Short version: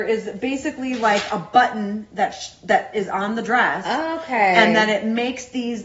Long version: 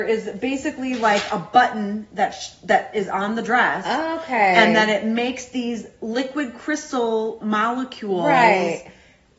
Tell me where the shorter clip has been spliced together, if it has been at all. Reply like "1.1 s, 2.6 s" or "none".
none